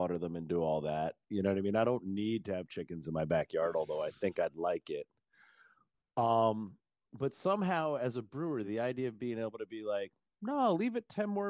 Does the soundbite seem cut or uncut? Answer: uncut